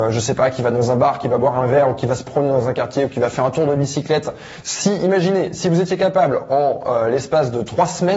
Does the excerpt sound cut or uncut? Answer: cut